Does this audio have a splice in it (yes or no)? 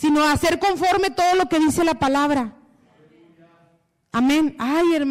no